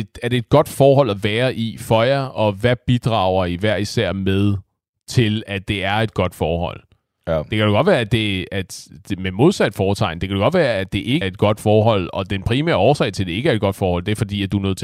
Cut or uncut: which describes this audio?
cut